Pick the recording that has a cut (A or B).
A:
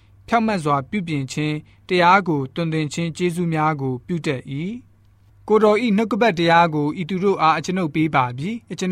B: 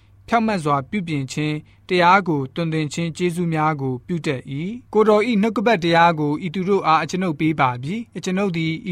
B